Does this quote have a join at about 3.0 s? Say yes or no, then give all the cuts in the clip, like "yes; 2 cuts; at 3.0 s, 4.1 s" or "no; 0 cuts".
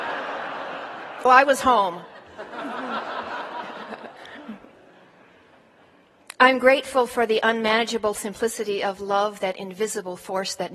no; 1 cut; at 1.3 s